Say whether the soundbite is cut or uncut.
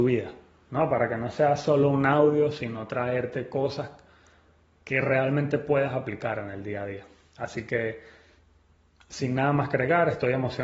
uncut